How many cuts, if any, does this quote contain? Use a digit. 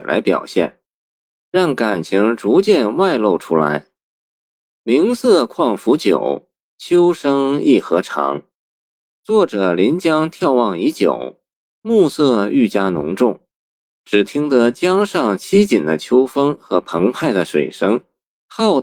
0